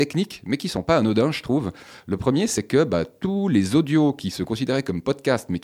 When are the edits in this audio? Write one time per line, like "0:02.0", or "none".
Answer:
none